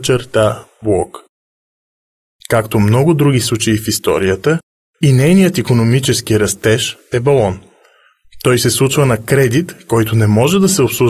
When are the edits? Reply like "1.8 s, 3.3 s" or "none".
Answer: 2.4 s